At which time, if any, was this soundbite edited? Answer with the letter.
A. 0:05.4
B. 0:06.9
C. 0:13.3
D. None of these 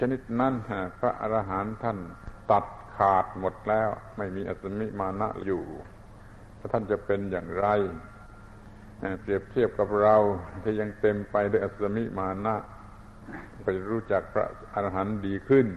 A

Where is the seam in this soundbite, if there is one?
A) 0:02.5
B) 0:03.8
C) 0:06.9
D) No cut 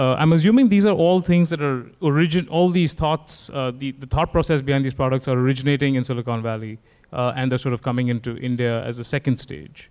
D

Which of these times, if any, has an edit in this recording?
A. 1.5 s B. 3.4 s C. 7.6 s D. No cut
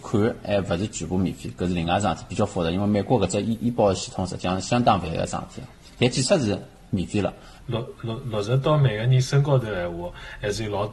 C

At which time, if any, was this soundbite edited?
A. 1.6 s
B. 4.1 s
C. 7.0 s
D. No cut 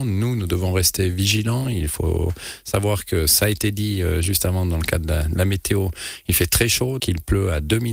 C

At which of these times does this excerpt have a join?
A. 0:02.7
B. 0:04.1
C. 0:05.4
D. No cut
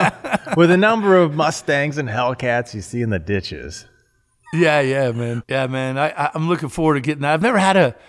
C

